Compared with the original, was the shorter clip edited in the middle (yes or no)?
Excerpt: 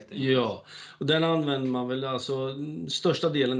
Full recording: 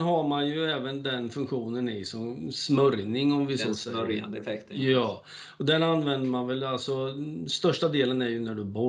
no